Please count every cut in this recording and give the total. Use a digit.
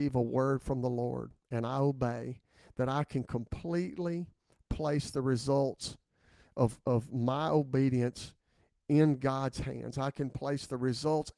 0